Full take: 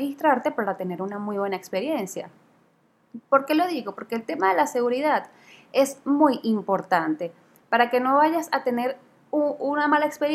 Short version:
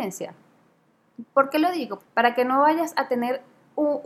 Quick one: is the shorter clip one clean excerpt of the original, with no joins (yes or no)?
no